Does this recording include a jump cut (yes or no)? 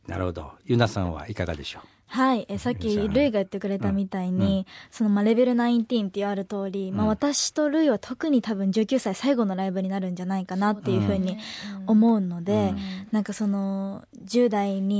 no